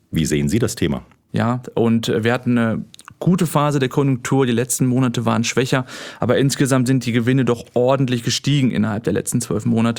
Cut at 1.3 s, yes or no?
yes